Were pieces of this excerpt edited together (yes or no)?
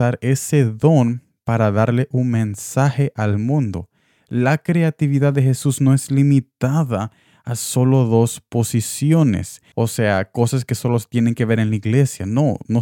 yes